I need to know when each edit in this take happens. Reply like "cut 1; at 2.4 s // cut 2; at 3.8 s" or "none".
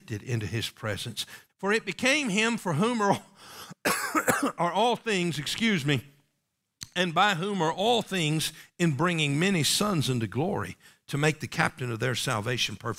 cut 1; at 1.5 s

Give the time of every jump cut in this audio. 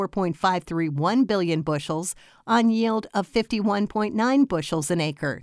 none

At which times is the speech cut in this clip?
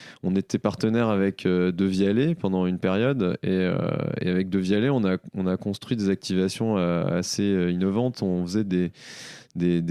none

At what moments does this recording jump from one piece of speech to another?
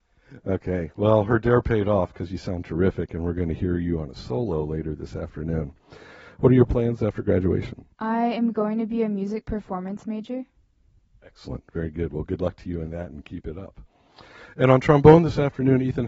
cut 1; at 7.9 s

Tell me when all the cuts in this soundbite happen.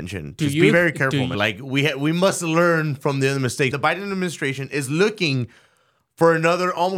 cut 1; at 1.3 s // cut 2; at 3.7 s

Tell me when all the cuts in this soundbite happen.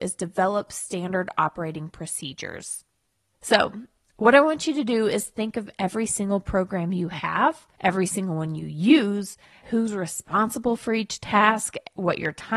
cut 1; at 3.3 s // cut 2; at 7.7 s // cut 3; at 9.6 s

